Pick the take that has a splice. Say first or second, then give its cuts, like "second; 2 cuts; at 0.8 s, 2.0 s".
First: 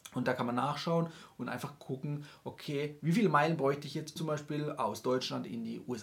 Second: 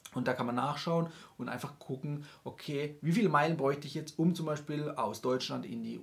first; 1 cut; at 4.2 s